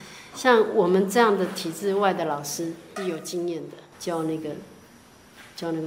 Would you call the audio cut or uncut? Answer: cut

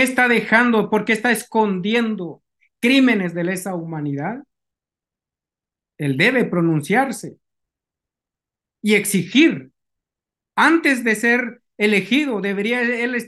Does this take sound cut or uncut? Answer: uncut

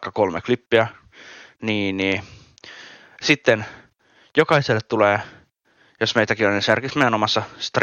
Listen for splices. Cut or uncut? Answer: uncut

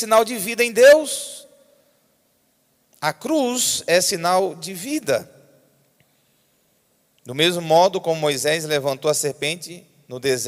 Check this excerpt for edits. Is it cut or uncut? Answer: uncut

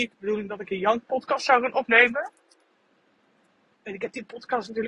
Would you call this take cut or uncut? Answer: cut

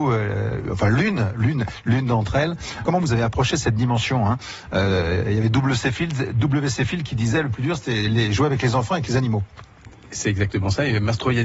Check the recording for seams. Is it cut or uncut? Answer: cut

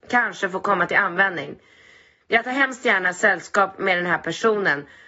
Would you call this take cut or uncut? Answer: cut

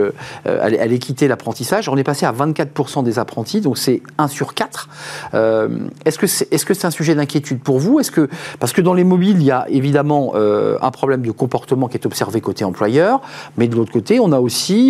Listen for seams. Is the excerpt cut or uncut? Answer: uncut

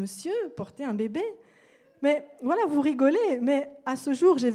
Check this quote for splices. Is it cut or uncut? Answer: uncut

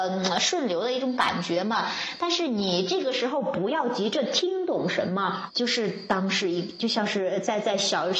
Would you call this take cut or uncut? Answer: cut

